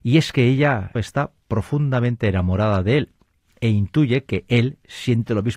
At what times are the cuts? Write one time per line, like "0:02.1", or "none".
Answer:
0:01.0